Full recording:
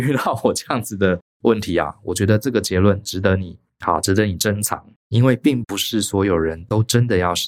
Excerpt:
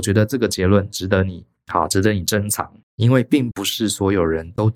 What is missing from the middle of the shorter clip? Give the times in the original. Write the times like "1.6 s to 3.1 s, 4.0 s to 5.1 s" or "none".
none